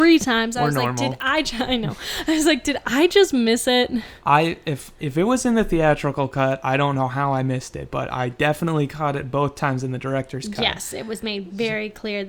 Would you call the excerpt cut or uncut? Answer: uncut